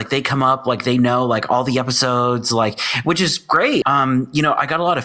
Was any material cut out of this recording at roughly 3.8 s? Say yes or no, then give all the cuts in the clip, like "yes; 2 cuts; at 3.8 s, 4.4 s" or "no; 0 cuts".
yes; 1 cut; at 3.8 s